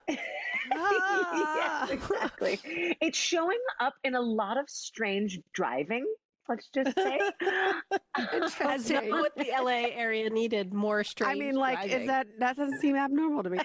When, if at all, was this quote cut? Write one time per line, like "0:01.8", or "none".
none

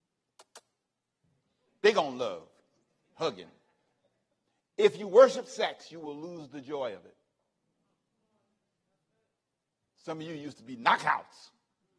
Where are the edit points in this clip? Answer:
0:03.1
0:09.9

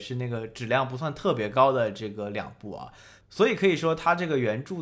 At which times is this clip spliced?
none

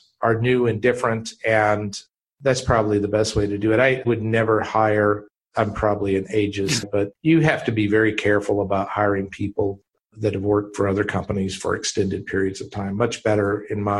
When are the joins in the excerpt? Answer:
0:06.8

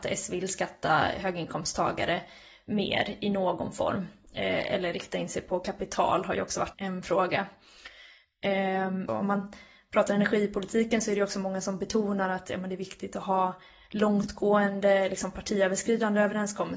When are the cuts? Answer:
0:06.7
0:09.1

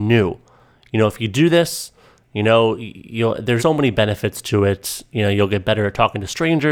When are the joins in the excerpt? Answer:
0:03.6

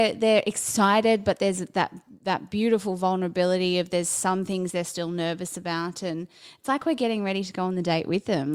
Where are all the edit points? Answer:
none

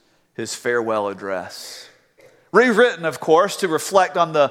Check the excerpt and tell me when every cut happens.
none

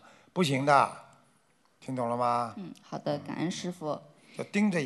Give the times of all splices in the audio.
none

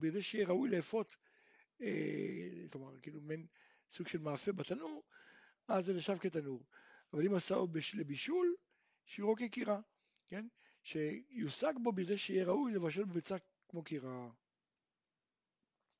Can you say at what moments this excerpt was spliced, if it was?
0:02.7

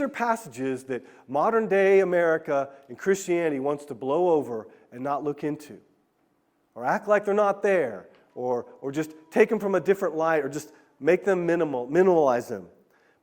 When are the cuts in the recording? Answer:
none

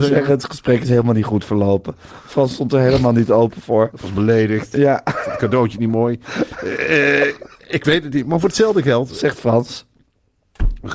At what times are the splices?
none

